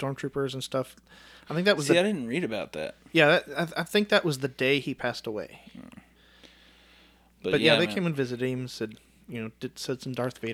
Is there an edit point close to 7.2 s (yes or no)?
no